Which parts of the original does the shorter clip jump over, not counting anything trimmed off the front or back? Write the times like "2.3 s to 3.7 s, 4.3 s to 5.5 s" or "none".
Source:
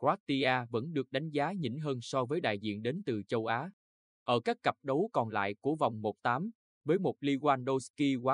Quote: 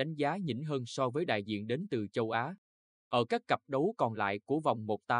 none